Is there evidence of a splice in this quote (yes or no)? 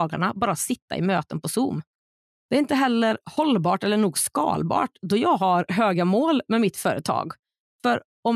no